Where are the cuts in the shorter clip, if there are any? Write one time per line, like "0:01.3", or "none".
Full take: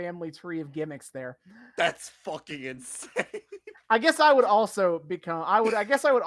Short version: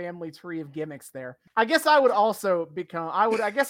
0:01.5